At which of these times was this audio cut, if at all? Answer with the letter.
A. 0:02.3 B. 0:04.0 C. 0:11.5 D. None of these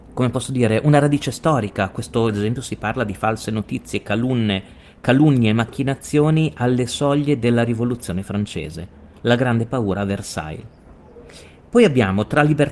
A